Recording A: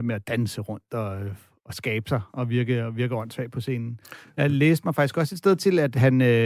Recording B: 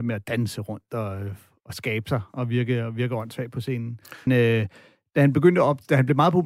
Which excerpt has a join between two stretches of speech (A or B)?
B